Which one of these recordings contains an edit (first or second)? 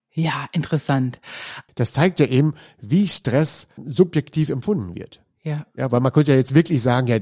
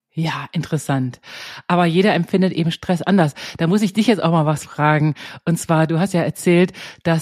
first